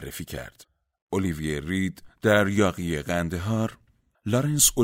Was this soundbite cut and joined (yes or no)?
yes